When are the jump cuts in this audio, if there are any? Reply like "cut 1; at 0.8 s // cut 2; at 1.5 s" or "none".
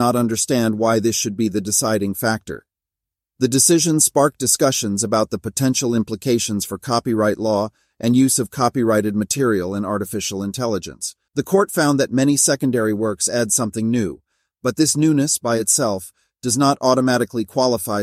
cut 1; at 11.3 s